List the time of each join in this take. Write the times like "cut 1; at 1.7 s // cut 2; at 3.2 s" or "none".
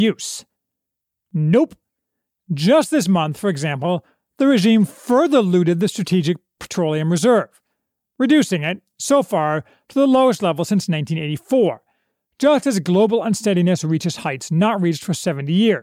none